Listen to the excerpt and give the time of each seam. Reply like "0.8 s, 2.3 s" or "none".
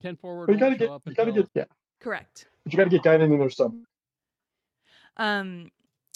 1.5 s